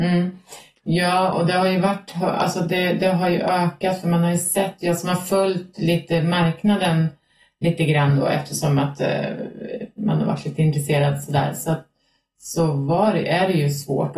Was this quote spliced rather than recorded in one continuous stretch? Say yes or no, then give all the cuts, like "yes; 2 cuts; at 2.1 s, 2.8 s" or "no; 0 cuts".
no; 0 cuts